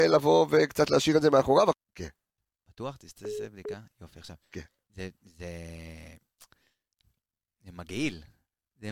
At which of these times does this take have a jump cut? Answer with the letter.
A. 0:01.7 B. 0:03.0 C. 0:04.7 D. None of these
A